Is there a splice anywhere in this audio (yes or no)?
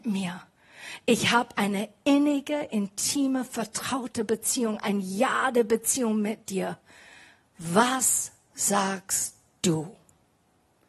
no